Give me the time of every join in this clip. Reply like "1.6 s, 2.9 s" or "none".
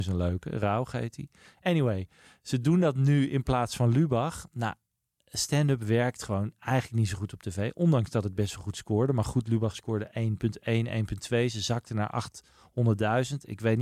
none